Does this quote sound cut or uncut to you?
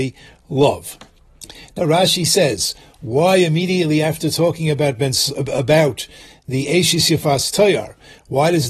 uncut